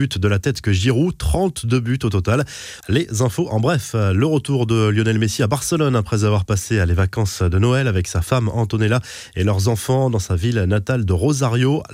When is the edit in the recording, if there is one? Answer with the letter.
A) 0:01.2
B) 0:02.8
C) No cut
B